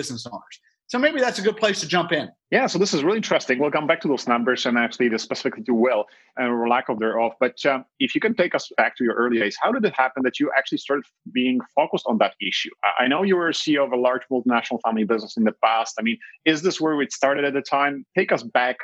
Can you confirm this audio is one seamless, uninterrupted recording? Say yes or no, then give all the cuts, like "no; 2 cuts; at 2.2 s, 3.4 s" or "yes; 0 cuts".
yes; 0 cuts